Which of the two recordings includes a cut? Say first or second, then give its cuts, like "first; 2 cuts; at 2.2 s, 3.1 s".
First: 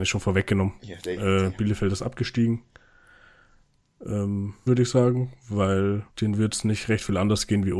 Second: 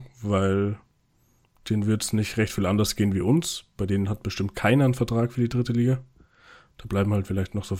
first; 2 cuts; at 4.7 s, 6.1 s